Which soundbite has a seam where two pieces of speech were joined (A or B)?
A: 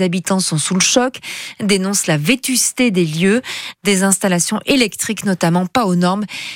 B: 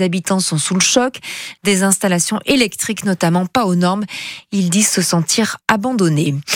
B